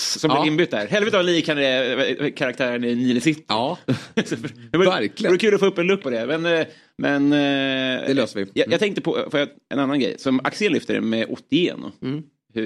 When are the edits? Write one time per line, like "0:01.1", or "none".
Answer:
0:06.0